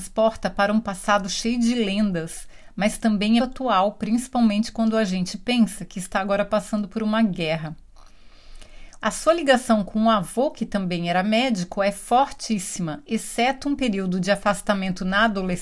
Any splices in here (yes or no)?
yes